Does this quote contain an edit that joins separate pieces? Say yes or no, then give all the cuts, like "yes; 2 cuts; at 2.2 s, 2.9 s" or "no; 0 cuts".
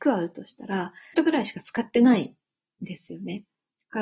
yes; 1 cut; at 1.1 s